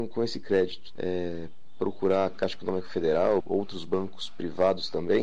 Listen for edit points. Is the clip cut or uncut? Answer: cut